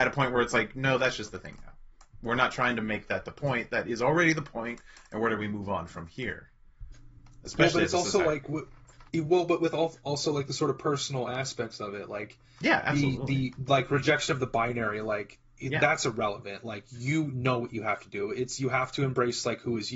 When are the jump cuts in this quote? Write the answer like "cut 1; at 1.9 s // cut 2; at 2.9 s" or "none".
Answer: none